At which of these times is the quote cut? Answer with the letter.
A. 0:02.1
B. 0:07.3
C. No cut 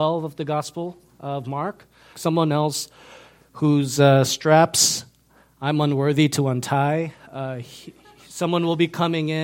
A